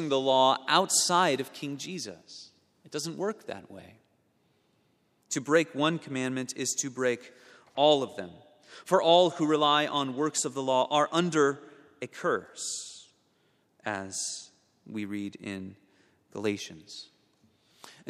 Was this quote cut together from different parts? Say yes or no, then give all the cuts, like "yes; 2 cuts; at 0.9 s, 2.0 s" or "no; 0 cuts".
no; 0 cuts